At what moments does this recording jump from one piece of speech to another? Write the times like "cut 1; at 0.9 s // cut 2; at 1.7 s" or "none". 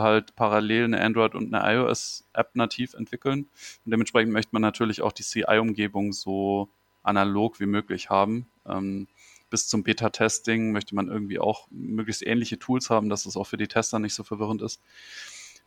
none